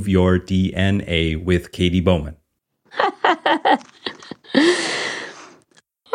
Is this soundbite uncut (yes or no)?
no